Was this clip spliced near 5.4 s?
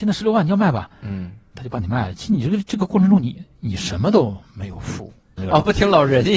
yes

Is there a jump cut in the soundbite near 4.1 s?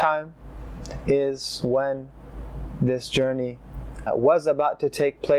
yes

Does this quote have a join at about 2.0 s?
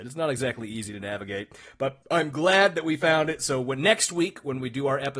yes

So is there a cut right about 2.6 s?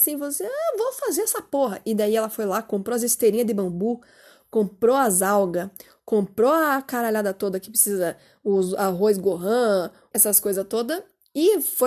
no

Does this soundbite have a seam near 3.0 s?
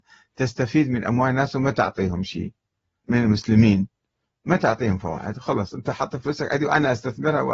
yes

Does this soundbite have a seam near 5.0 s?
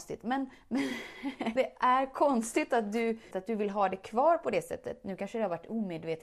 no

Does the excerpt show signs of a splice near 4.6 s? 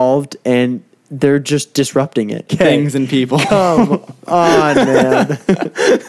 no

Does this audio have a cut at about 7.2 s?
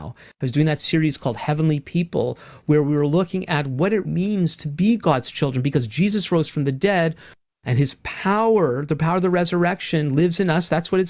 no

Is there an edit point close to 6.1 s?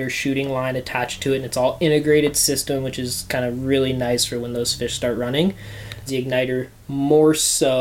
yes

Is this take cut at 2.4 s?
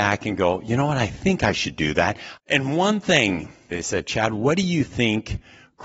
yes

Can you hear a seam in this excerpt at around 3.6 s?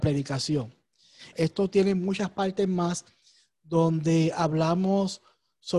no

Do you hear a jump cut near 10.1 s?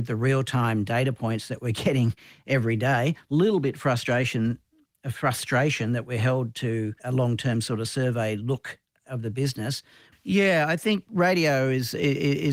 yes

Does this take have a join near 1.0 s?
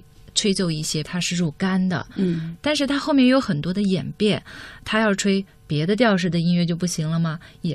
yes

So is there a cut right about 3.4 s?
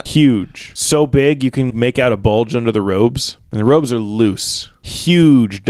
no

